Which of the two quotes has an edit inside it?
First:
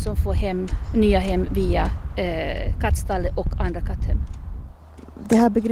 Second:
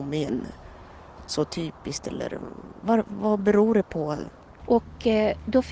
second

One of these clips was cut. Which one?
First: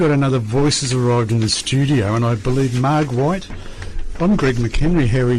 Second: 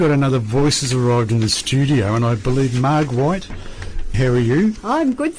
second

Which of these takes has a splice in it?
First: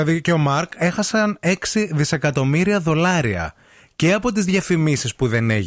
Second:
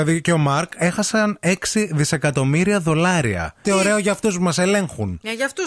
second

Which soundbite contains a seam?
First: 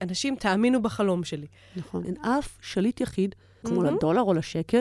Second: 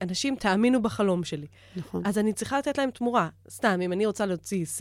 first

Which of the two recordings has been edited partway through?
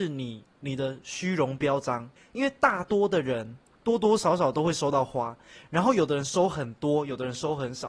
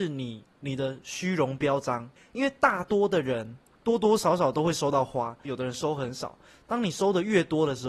second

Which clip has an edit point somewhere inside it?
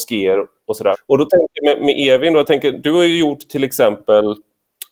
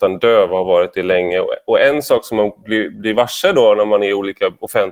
first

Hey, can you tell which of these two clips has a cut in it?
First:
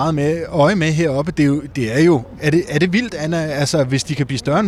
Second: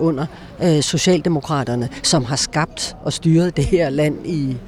first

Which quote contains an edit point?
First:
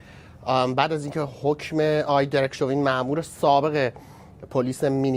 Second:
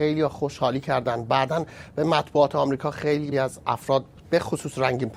second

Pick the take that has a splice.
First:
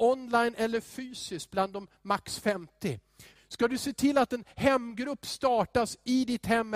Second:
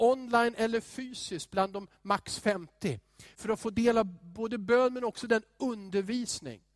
first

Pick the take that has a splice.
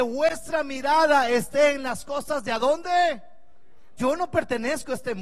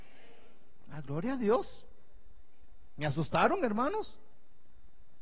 first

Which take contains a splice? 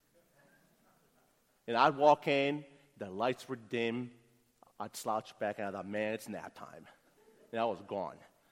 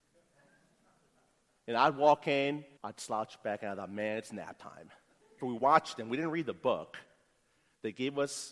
second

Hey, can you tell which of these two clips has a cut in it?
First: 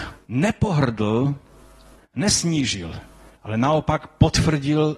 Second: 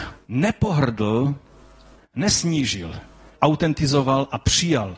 second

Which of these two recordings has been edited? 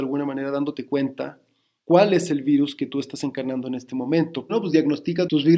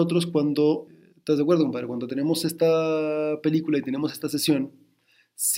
first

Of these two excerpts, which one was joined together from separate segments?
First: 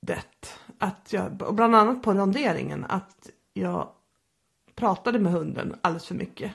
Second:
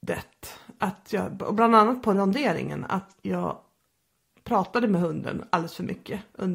second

